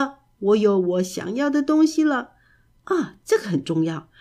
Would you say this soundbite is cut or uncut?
uncut